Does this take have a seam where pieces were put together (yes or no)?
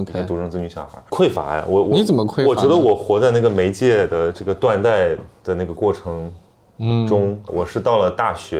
yes